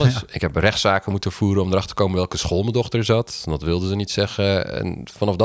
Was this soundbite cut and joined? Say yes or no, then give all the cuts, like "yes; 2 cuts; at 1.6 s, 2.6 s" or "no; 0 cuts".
no; 0 cuts